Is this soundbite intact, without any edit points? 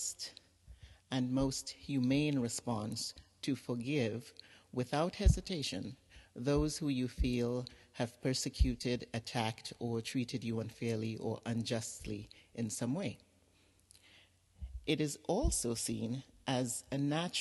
yes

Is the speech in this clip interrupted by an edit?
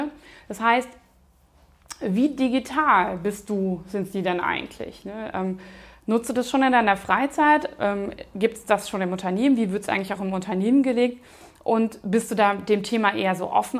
no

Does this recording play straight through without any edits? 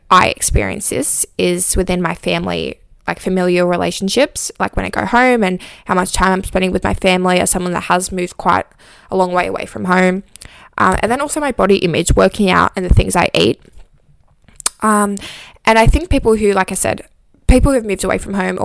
yes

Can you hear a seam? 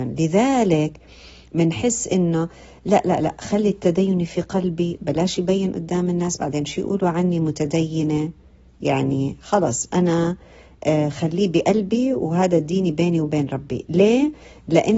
no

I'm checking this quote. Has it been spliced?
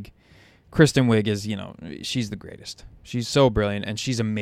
no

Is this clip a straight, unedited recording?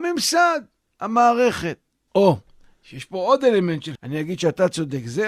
no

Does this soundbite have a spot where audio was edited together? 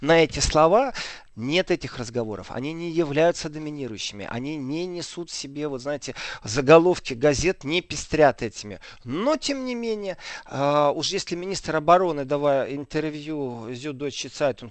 yes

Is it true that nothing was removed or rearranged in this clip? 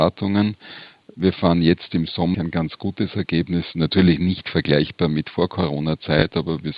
no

